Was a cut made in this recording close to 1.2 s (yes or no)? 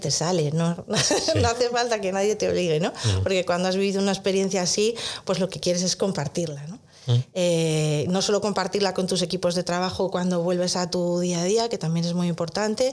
no